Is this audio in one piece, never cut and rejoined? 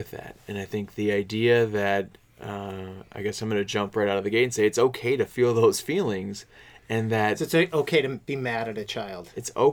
yes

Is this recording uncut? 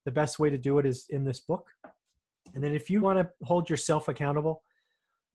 no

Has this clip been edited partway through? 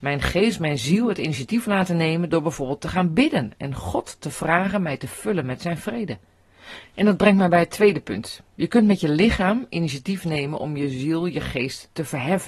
yes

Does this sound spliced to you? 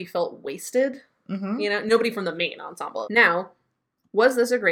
yes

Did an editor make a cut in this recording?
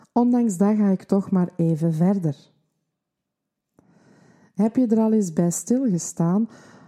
no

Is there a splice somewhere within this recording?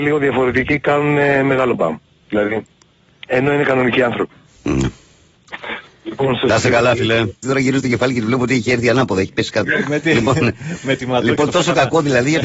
yes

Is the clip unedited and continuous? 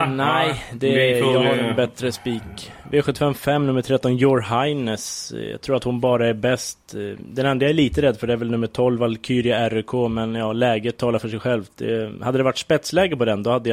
yes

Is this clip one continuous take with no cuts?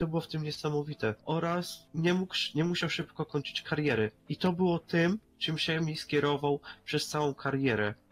no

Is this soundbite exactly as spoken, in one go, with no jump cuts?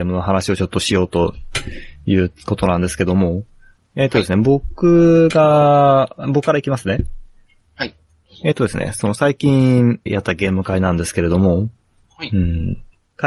no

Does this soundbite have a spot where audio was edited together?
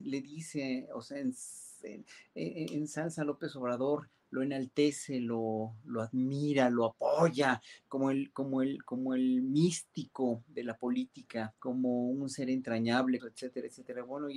yes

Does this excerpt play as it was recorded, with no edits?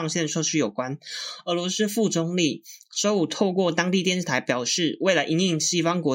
yes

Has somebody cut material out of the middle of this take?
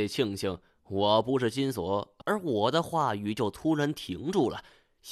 yes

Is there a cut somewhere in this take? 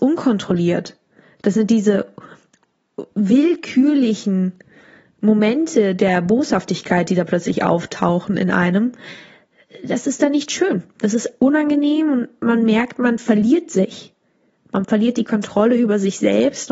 no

